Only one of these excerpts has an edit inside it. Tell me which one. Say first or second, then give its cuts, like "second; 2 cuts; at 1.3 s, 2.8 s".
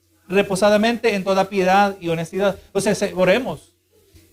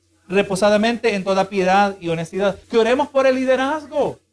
second; 1 cut; at 2.6 s